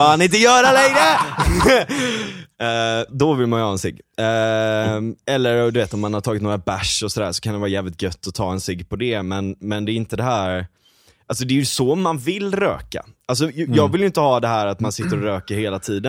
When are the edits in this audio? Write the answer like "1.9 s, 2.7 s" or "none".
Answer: 3.1 s